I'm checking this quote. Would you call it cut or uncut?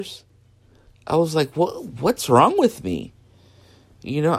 uncut